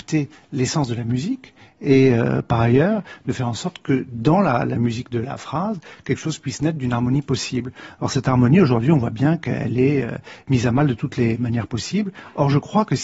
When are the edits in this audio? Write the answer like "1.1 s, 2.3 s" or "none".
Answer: none